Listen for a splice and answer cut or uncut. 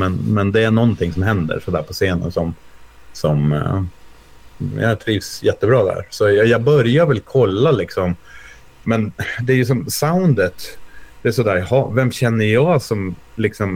uncut